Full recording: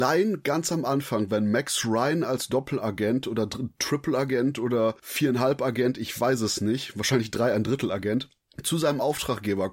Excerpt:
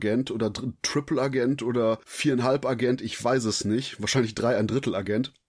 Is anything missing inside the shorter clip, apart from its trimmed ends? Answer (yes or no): no